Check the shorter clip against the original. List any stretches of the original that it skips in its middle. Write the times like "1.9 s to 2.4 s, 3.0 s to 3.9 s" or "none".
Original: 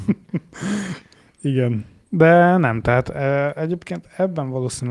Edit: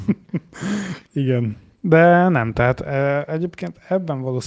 1.1 s to 1.3 s